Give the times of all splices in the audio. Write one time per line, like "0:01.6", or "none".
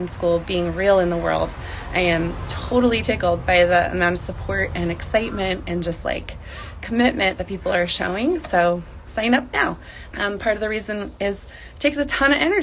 0:10.1